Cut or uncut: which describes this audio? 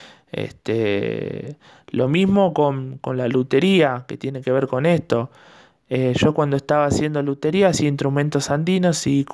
uncut